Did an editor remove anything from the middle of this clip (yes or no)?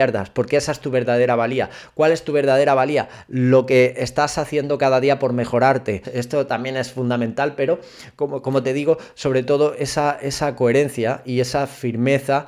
yes